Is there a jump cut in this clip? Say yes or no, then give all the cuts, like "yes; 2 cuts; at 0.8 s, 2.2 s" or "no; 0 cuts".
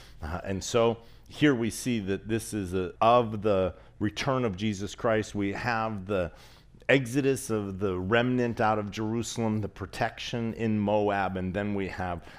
yes; 1 cut; at 3.0 s